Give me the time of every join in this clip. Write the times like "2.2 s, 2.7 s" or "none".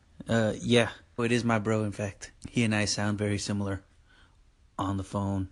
1.2 s, 2.4 s

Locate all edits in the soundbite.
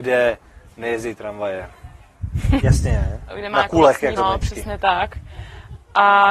2.6 s, 4.2 s

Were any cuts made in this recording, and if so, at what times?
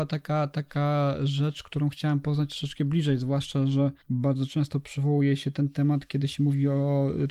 4.0 s

